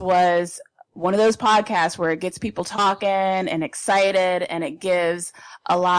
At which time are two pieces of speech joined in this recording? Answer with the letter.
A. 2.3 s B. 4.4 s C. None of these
C